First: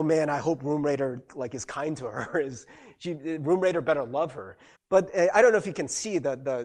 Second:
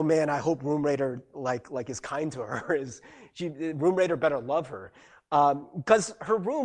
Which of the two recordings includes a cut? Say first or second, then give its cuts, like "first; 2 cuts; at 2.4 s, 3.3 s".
first; 2 cuts; at 1.3 s, 4.7 s